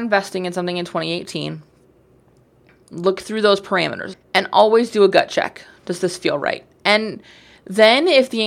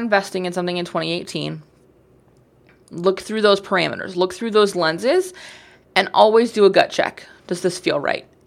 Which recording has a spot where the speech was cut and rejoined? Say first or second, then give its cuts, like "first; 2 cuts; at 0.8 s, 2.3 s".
first; 1 cut; at 4.1 s